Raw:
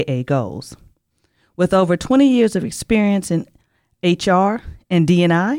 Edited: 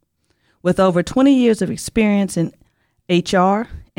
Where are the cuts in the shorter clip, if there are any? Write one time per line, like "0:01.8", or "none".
none